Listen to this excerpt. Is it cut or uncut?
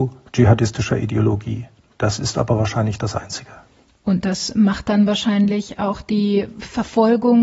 uncut